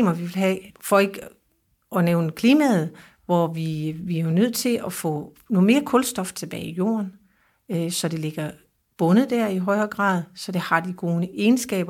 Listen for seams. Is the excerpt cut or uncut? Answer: uncut